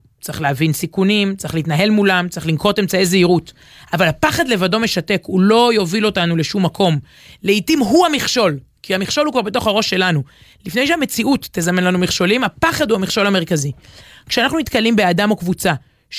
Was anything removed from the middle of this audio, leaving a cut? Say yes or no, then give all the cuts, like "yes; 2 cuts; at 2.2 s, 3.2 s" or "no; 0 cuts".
no; 0 cuts